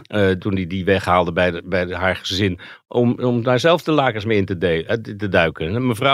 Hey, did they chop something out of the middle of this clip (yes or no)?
no